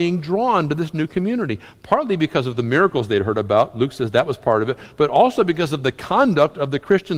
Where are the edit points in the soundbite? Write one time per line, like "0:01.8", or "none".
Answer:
none